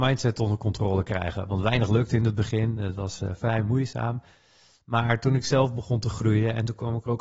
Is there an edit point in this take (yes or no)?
no